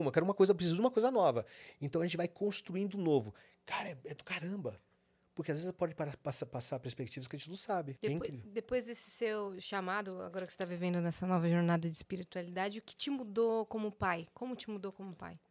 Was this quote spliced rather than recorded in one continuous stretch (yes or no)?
yes